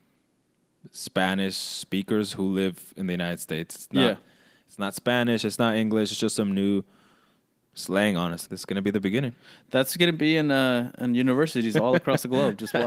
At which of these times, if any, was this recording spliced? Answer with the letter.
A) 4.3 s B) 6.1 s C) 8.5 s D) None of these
C